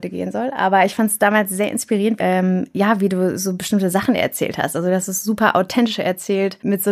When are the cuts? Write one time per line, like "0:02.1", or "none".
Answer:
0:02.2

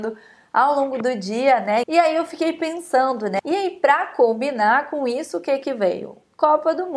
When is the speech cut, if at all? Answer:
0:01.8
0:03.4

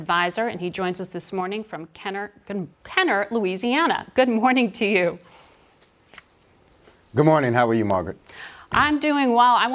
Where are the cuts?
0:02.7

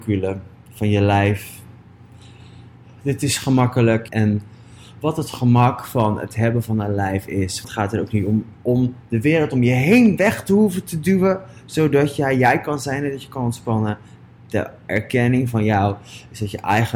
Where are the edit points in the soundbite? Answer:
0:04.1
0:07.6

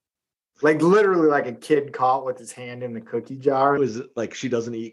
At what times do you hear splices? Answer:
0:03.8

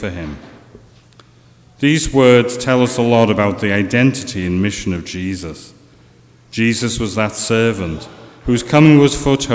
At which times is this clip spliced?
none

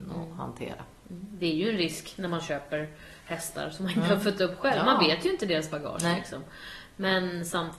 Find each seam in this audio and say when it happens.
none

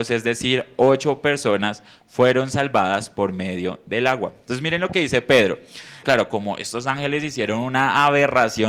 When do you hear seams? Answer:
0:06.0

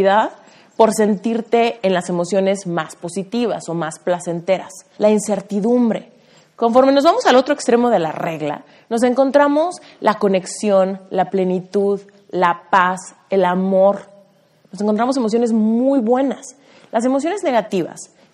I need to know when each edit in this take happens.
0:05.0

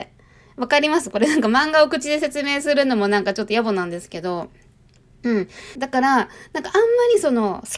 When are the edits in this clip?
0:05.8

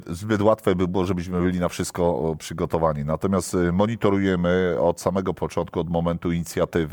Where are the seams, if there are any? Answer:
none

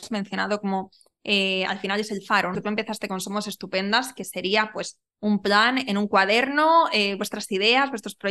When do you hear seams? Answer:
0:02.5

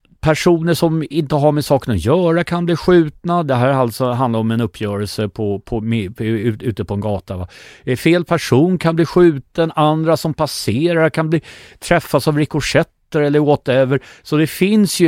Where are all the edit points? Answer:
none

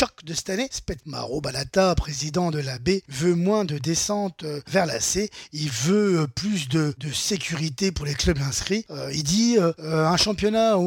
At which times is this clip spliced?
0:01.0

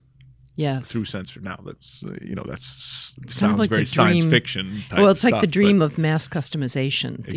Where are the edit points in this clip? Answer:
none

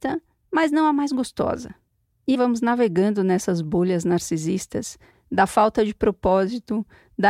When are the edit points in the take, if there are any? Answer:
0:02.3
0:05.1

